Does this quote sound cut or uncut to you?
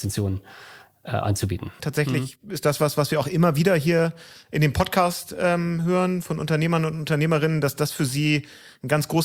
cut